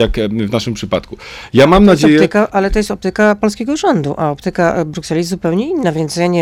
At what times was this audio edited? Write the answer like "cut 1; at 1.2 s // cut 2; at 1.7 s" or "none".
none